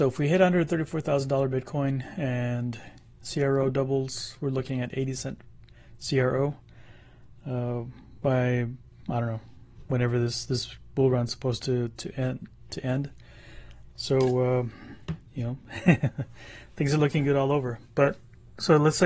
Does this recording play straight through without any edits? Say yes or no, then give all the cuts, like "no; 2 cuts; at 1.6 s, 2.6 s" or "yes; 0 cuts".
no; 1 cut; at 13.9 s